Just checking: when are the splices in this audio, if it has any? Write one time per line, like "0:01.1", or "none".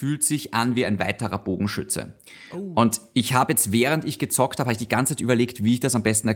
none

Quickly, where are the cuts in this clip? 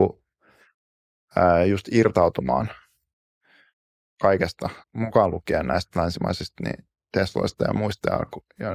0:04.8

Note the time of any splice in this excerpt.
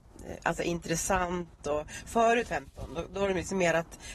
0:02.4

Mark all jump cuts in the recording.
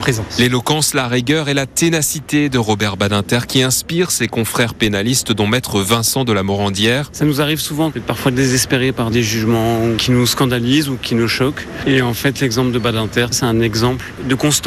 0:13.3

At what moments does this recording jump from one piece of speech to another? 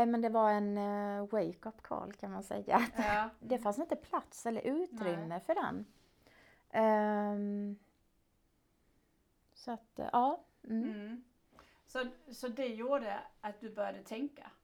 0:03.4

